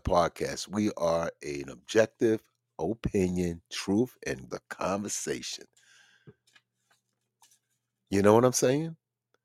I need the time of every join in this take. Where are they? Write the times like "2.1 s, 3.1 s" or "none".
4.5 s